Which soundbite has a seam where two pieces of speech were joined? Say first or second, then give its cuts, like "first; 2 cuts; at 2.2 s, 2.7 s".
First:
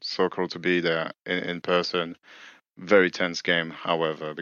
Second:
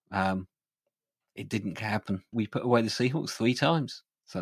second; 1 cut; at 2.3 s